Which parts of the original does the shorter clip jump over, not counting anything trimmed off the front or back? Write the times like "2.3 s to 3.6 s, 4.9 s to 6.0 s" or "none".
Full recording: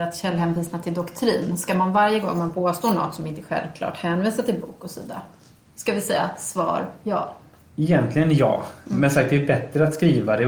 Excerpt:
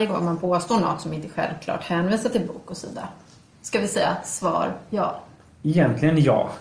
none